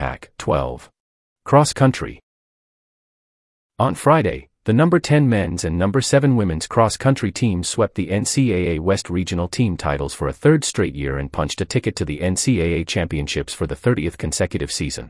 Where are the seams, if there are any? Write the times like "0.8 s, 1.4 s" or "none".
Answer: 1.3 s